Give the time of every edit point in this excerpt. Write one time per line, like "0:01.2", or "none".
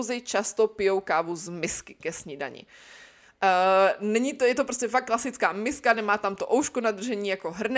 none